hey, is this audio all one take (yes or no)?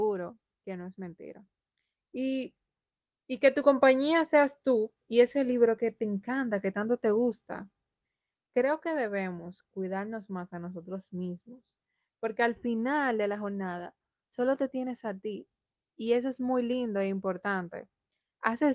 no